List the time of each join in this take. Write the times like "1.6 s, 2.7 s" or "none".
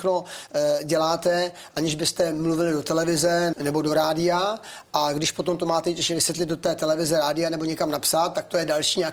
3.5 s